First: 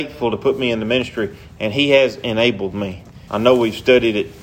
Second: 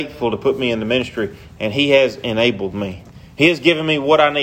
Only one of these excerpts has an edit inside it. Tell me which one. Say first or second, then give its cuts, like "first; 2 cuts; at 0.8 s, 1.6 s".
first; 1 cut; at 3.3 s